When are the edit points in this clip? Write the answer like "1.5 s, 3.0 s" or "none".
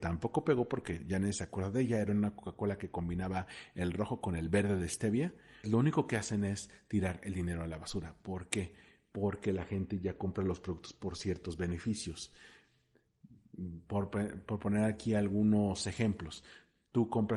5.6 s